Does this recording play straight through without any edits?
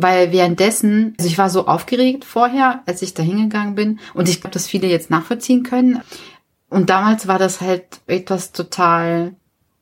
no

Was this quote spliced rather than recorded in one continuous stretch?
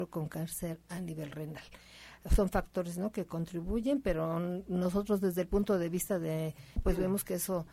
yes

